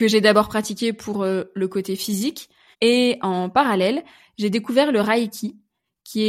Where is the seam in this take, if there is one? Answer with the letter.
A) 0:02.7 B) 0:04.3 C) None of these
A